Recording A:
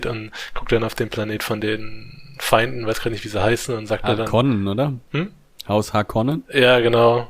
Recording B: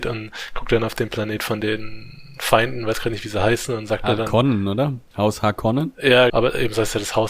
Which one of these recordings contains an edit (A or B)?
B